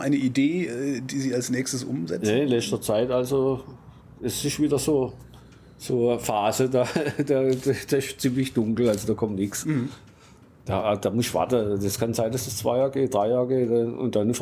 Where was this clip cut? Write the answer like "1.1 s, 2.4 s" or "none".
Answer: none